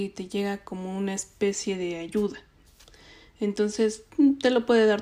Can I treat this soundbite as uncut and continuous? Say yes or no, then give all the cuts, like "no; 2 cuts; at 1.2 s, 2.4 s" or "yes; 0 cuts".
yes; 0 cuts